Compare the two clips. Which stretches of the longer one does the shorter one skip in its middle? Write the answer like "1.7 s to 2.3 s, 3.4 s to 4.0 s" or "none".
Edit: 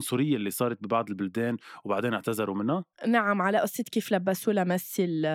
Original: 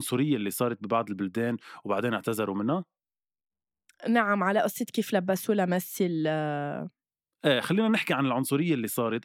2.9 s to 3.9 s